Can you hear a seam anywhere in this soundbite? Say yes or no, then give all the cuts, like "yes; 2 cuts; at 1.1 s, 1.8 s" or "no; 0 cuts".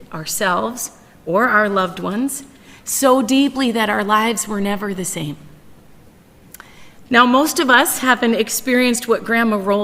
yes; 1 cut; at 7.0 s